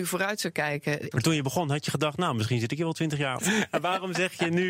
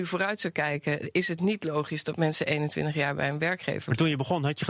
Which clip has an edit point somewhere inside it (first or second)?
first